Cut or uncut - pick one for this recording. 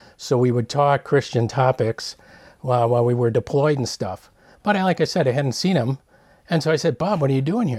uncut